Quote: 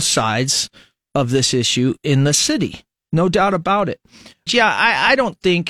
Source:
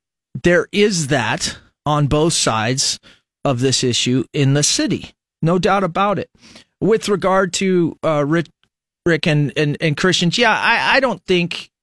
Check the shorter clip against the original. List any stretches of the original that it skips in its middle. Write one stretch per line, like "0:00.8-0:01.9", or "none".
0:06.8-0:10.3